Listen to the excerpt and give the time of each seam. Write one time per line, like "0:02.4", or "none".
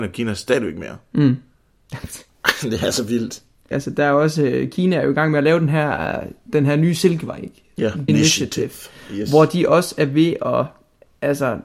0:03.7
0:08.1

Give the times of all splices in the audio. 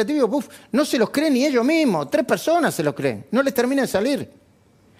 none

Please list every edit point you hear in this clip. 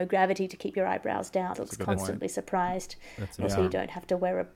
0:01.5

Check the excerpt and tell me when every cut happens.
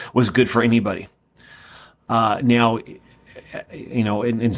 none

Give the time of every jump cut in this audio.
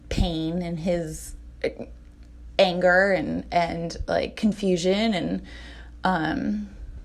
none

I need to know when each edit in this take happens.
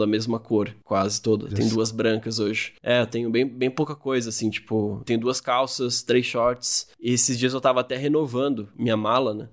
0:01.5

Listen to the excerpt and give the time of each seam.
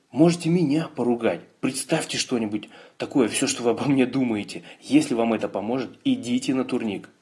none

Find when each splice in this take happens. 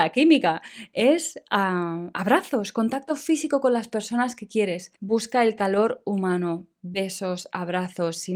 0:05.0

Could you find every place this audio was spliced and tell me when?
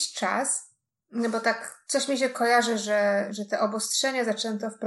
0:01.0

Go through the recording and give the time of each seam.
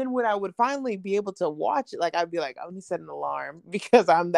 none

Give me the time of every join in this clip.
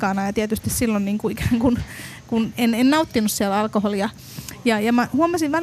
none

